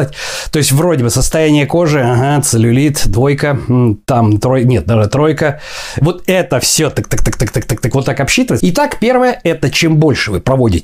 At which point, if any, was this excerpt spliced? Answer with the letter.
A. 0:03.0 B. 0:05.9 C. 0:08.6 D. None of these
C